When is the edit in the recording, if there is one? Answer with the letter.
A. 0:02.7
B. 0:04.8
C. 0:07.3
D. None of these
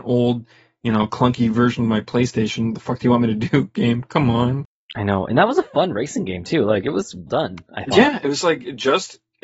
C